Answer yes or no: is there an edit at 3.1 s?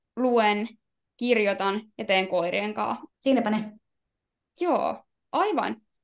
yes